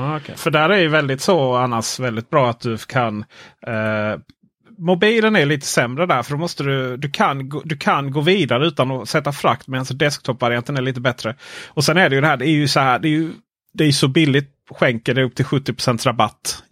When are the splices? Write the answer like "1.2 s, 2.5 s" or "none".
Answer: none